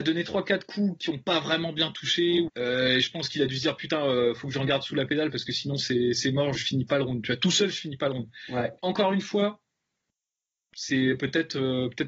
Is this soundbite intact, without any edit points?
no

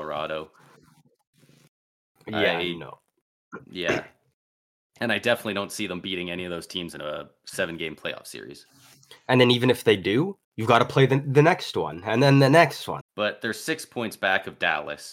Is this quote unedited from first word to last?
no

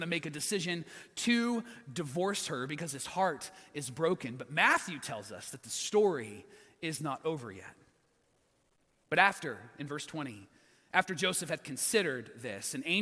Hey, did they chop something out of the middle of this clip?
no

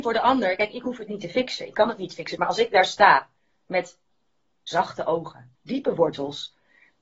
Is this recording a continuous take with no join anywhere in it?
no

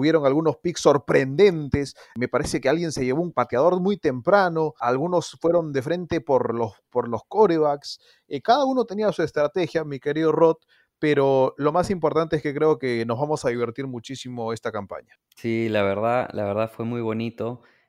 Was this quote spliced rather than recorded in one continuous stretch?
no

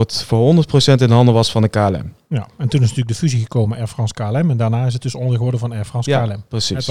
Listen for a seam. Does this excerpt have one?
no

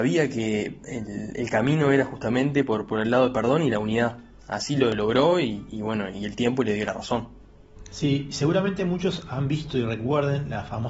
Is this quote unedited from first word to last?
yes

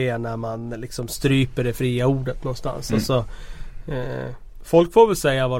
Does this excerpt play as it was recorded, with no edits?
yes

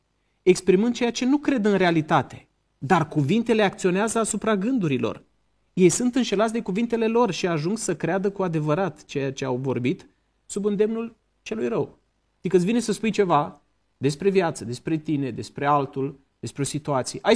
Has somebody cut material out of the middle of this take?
no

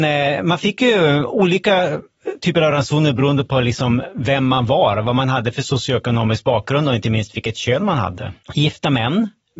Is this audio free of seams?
no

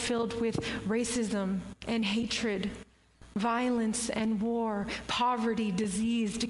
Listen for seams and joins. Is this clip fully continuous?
yes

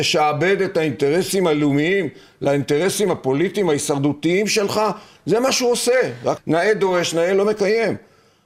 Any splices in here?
yes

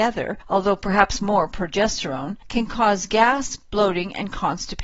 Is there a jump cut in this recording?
no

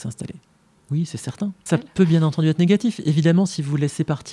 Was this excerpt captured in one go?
no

